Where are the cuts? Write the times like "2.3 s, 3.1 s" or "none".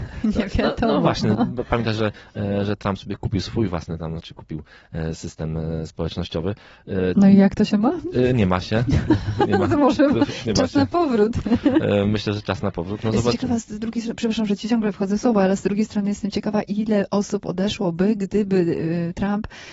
4.2 s